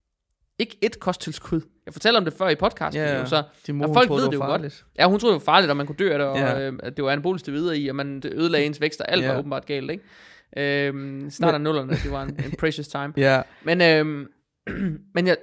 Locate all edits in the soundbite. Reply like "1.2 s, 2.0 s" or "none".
8.2 s